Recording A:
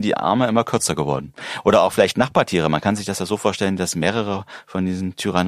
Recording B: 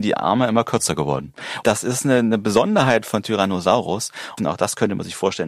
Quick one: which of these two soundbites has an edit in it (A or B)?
B